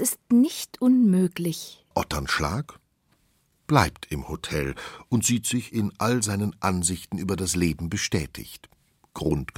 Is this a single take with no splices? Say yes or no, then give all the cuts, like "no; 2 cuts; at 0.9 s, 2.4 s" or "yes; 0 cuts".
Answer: no; 1 cut; at 1.9 s